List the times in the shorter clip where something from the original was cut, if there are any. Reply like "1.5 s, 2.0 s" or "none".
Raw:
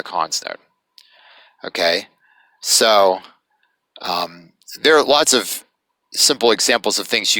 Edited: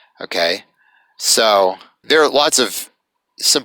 2.0 s